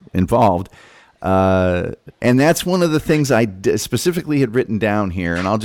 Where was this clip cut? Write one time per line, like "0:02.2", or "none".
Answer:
none